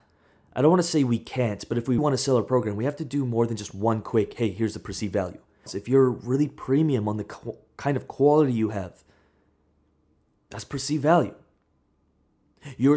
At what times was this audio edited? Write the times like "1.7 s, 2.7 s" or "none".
2.0 s, 5.7 s